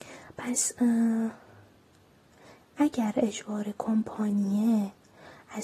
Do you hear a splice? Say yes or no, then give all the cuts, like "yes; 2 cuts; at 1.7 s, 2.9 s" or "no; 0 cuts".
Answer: no; 0 cuts